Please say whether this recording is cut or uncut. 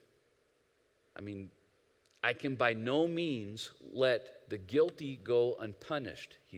cut